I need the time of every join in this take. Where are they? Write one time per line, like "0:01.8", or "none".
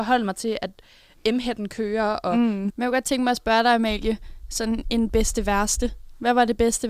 0:02.7

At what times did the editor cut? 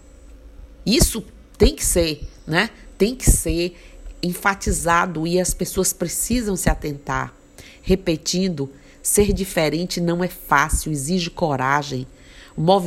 none

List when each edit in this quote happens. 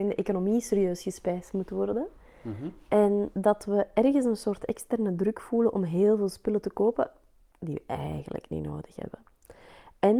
none

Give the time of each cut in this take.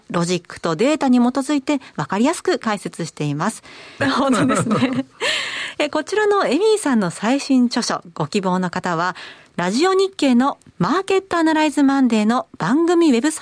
0:04.0

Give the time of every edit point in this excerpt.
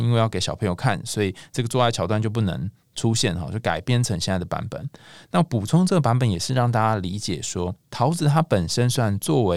none

